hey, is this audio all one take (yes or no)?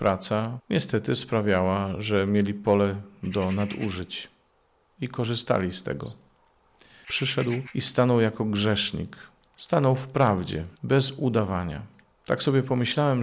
no